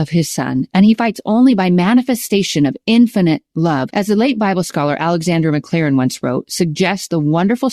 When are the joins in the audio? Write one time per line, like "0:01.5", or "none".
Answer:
0:03.9
0:06.4